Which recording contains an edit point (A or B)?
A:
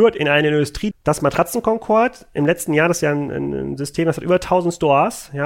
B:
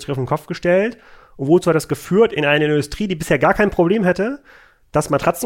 A